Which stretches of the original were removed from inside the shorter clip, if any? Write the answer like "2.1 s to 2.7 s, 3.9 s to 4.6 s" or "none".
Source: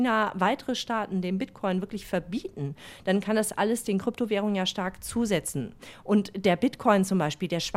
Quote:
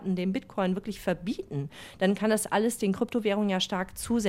none